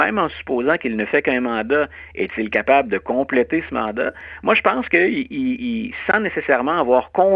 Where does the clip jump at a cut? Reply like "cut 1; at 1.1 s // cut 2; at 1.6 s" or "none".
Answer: none